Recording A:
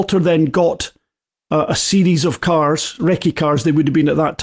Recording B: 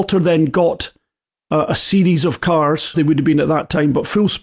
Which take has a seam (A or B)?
B